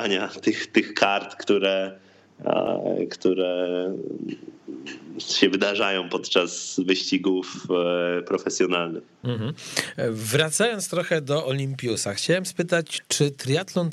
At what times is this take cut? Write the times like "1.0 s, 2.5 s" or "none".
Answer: none